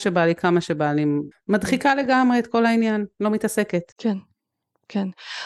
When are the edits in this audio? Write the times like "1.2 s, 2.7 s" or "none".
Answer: 1.3 s